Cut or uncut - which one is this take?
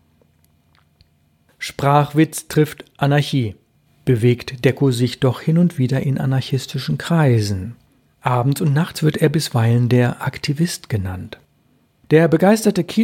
uncut